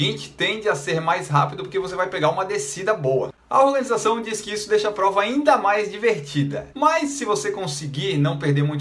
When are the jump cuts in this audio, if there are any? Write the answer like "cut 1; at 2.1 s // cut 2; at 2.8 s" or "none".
cut 1; at 6.7 s